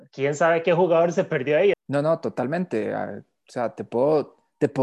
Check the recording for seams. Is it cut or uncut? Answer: cut